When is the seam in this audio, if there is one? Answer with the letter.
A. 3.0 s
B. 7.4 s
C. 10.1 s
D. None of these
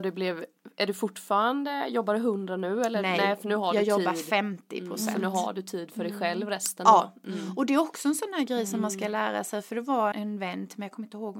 C